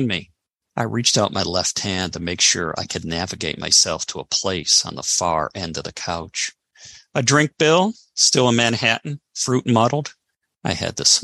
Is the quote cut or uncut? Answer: uncut